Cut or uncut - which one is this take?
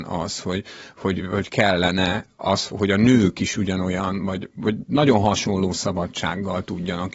cut